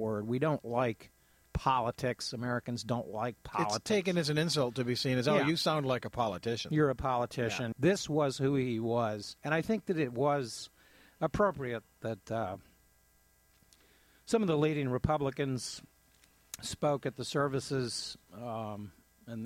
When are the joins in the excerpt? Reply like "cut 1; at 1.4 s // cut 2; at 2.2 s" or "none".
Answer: cut 1; at 7.7 s // cut 2; at 9.4 s

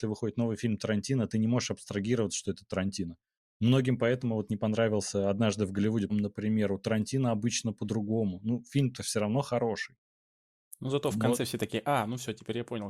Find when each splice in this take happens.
cut 1; at 6.1 s

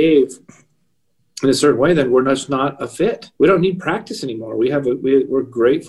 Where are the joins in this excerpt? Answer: cut 1; at 3.4 s

